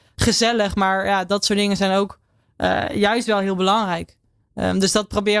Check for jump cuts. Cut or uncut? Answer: uncut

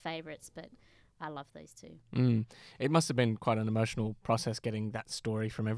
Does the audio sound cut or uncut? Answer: uncut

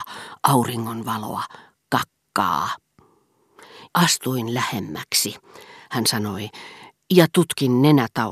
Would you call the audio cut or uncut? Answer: cut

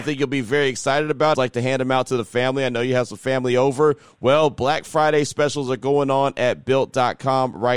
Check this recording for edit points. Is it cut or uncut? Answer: cut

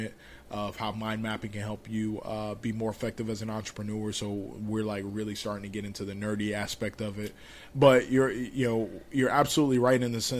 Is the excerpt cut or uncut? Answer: cut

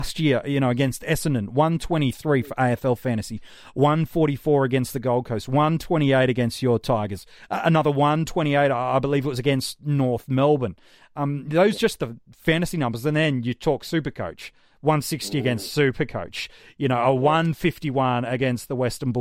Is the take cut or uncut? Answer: uncut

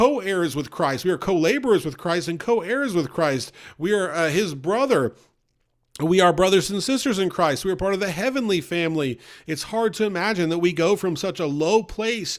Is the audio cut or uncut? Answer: uncut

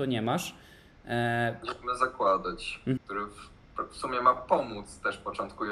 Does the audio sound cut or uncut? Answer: cut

